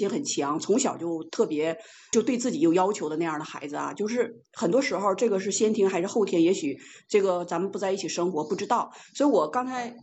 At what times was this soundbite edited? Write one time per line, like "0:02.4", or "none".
none